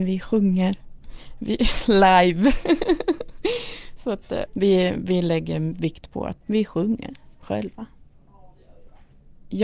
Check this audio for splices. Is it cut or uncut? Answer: cut